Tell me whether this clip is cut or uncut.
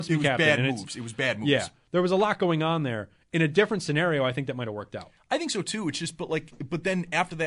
uncut